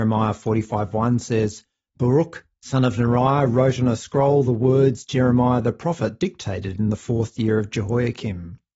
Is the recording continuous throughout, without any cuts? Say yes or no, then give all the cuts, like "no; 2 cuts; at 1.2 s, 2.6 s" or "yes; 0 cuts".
yes; 0 cuts